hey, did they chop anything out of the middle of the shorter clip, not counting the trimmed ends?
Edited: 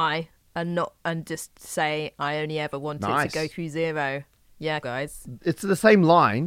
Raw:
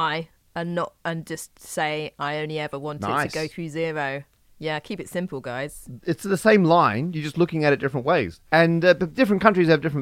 yes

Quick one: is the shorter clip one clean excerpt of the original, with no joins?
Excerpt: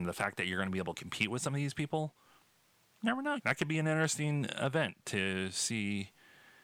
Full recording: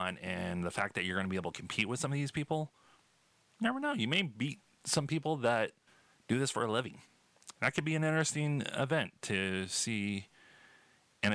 no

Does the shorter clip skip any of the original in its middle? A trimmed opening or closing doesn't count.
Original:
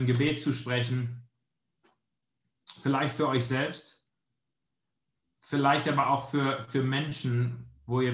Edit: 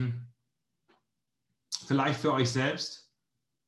no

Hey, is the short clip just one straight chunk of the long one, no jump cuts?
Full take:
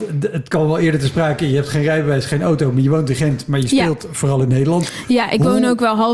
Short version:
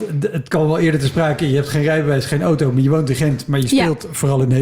yes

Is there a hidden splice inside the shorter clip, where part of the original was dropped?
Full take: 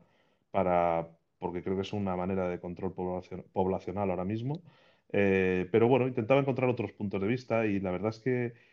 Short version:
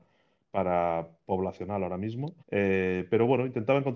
yes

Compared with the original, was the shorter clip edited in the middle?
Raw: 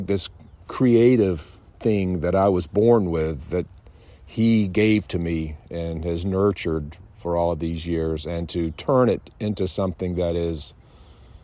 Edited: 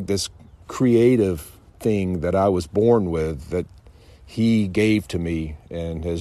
no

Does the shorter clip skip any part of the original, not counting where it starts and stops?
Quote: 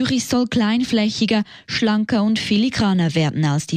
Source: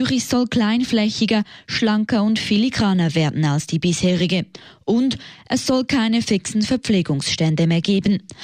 no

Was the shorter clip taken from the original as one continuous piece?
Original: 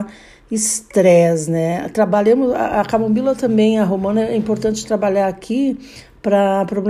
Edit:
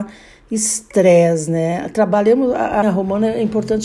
no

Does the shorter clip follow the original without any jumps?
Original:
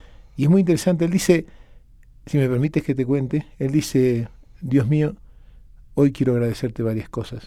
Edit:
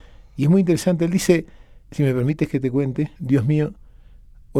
no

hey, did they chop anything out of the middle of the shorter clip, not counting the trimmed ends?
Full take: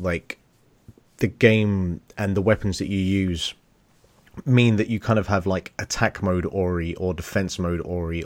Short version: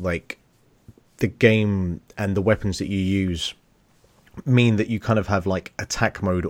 no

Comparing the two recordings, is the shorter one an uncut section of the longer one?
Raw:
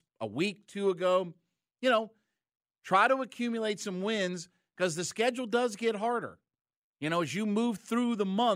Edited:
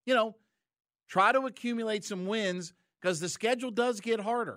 yes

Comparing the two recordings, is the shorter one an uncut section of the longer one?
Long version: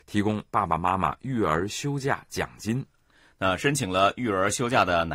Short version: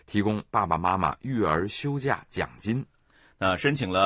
yes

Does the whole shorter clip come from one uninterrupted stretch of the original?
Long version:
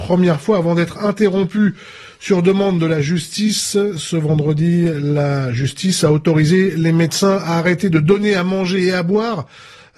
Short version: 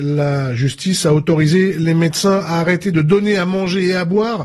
yes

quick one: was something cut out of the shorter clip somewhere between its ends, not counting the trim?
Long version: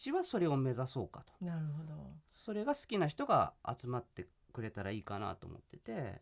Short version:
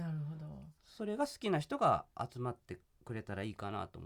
no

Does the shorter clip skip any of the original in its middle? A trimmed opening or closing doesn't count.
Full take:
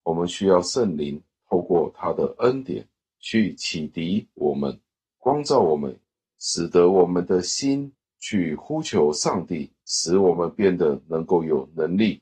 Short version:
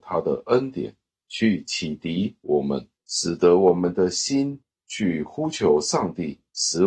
yes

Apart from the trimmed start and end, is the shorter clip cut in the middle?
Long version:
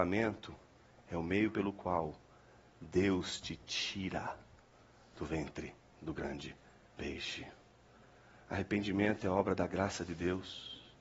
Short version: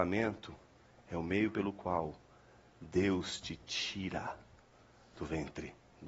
no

